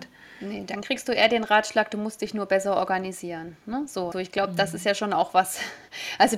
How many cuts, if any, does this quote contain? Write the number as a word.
one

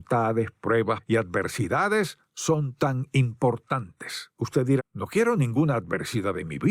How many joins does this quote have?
one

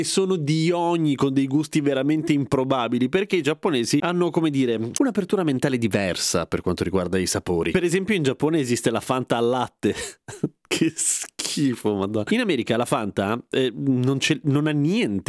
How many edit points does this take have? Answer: one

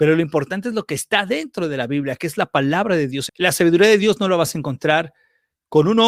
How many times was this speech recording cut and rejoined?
one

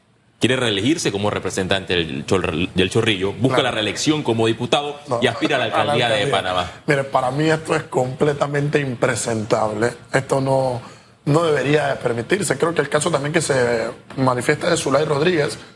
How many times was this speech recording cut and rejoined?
zero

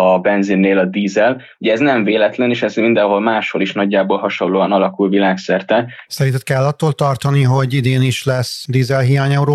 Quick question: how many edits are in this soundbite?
one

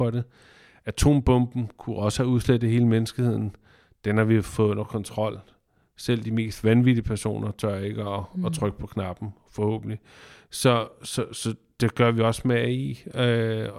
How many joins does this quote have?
zero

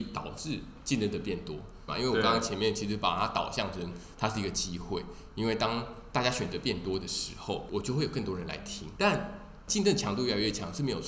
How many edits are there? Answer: one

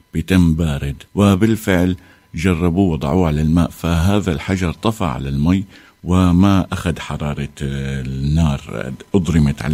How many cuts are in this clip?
one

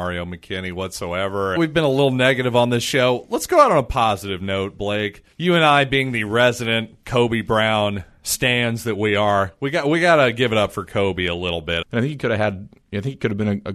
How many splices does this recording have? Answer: three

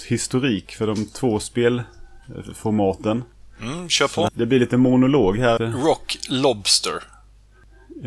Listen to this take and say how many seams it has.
two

